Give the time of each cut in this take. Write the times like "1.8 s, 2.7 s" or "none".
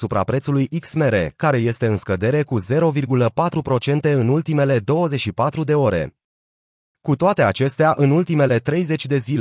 none

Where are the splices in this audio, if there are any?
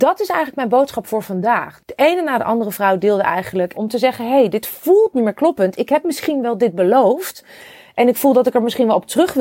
1.8 s, 3.7 s

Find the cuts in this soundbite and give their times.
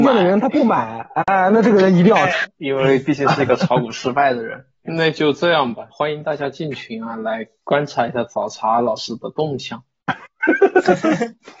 2.4 s, 4.8 s, 5.9 s

